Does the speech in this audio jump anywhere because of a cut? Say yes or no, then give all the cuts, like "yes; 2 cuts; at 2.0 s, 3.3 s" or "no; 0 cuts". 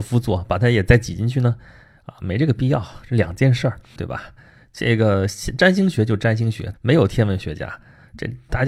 yes; 2 cuts; at 4.0 s, 6.7 s